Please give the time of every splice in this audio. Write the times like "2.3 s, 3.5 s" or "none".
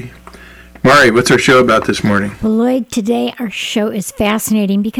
none